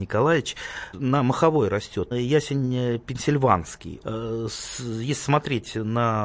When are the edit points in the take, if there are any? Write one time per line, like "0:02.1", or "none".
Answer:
0:00.9
0:02.1
0:04.0